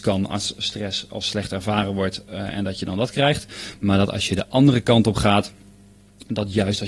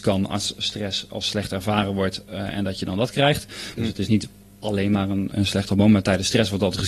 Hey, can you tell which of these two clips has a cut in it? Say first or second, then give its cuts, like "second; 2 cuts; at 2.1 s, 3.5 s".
second; 2 cuts; at 3.8 s, 5.3 s